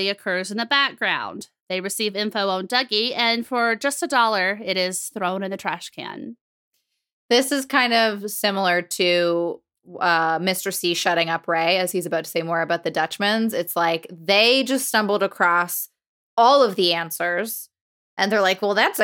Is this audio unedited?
yes; 0 cuts

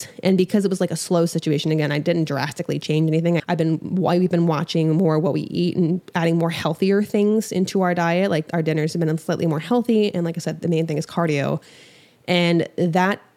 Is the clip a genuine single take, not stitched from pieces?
no; 1 cut; at 3.4 s

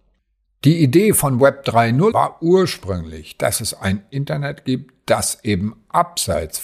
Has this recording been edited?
yes; 1 cut; at 2.1 s

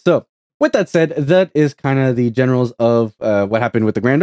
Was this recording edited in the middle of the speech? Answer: no; 0 cuts

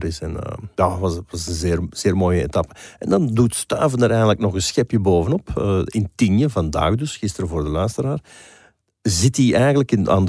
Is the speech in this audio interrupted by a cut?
no; 0 cuts

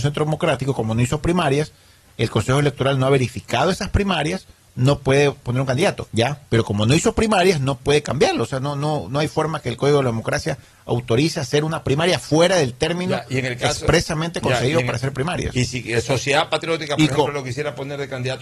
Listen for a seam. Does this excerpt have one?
yes; 1 cut; at 6.1 s

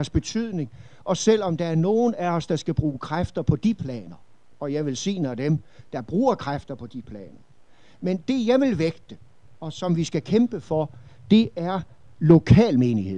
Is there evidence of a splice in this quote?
no; 0 cuts

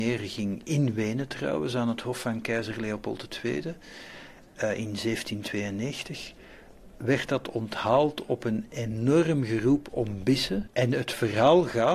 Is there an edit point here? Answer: yes; 1 cut; at 10.7 s

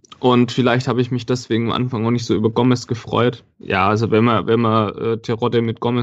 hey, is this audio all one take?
no; 1 cut; at 3.6 s

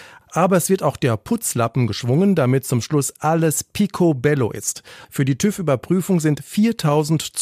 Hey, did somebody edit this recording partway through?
yes; 1 cut; at 5.0 s

